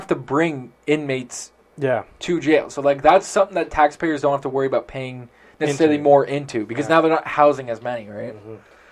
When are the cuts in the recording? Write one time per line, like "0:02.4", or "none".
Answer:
none